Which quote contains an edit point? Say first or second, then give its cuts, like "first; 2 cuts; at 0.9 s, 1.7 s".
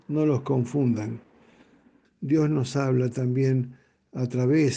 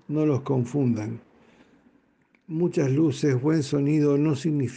first; 1 cut; at 2.0 s